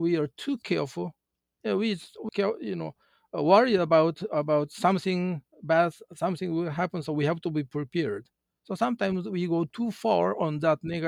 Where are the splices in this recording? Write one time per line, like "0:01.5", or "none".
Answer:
0:02.3